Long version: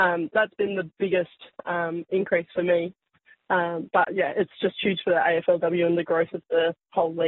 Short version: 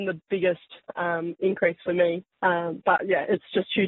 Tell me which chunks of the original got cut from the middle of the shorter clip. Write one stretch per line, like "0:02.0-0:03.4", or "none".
0:03.0-0:03.4

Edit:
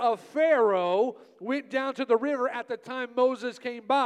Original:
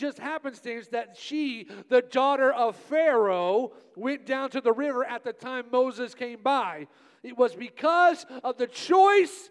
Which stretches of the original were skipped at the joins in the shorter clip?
none

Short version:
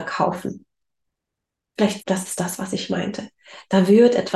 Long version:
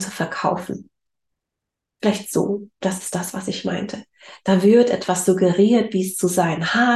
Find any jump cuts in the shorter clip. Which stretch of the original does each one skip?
0:02.2-0:02.7

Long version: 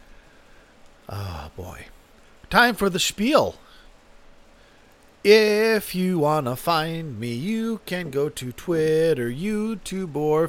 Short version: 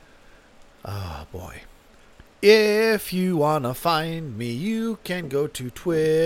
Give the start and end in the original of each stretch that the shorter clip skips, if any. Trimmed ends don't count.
0:02.5-0:05.0

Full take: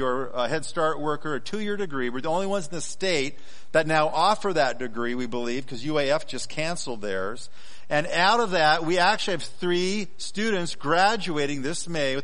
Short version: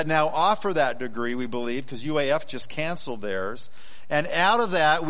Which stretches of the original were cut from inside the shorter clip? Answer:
none

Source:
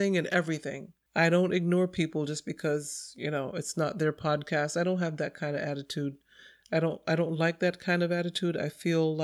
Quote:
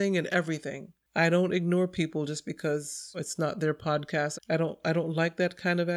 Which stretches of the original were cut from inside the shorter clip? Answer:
0:03.1-0:03.5
0:04.7-0:06.6

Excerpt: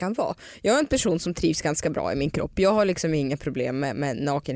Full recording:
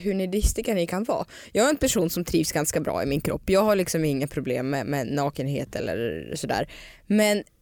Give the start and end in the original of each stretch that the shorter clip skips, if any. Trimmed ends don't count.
none

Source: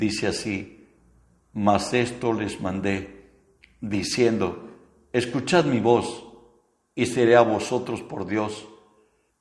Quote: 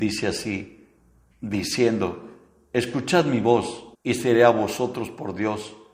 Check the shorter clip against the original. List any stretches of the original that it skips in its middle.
0:01.3-0:03.7
0:06.3-0:06.9

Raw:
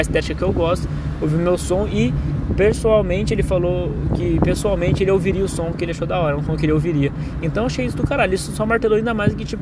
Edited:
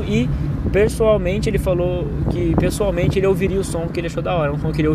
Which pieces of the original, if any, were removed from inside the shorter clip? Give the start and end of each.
none

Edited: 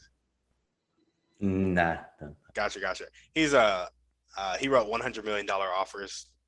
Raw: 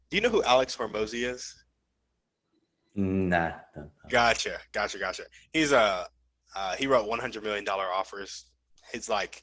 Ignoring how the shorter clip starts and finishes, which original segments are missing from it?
0:04.0-0:04.7

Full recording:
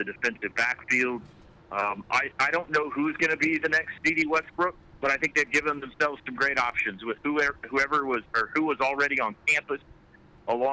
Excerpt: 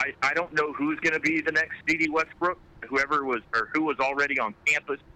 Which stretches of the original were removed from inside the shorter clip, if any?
0:05.0-0:07.6

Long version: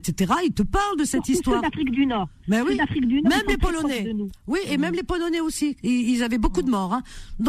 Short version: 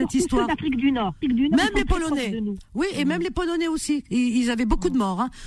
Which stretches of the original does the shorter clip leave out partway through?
0:02.4-0:02.9

